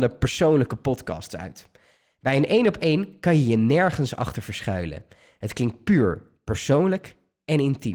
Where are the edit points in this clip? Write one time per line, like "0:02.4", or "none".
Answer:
none

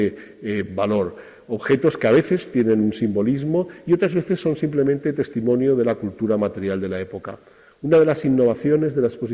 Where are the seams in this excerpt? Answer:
none

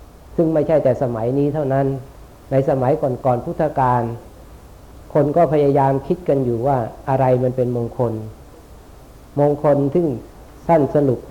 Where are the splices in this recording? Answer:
0:03.2

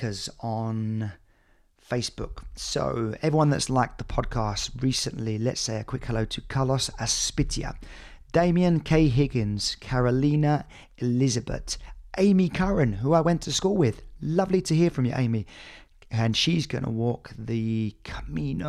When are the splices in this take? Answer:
none

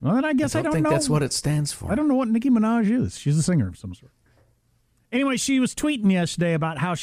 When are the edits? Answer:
none

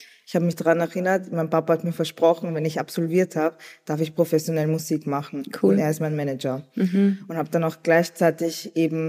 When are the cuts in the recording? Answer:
none

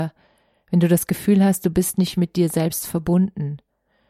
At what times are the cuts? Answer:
0:02.1

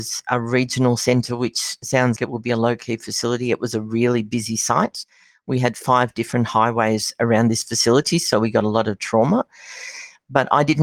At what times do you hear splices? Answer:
0:02.2

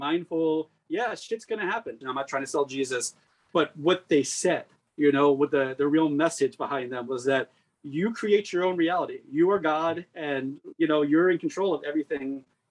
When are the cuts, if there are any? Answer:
0:02.0

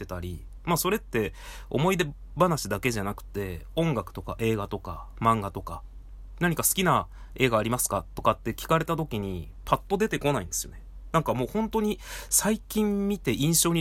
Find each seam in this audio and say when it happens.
none

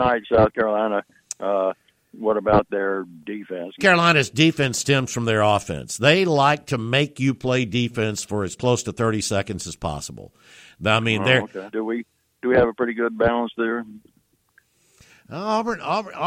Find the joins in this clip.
0:03.8
0:11.7

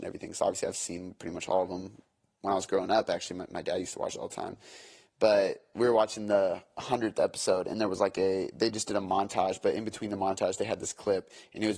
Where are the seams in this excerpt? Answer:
none

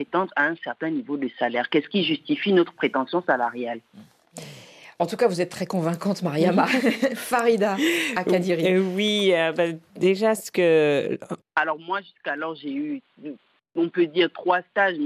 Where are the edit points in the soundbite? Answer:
0:11.4

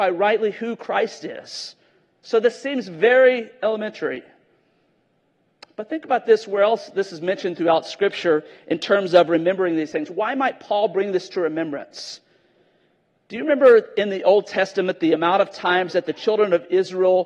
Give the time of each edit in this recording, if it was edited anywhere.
none

